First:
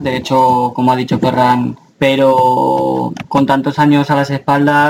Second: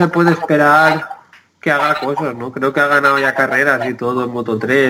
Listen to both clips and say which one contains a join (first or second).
first